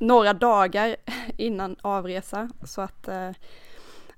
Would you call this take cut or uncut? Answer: uncut